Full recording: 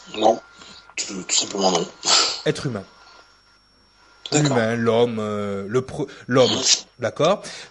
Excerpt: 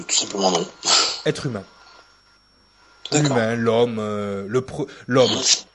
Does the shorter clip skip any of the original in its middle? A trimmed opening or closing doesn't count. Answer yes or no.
no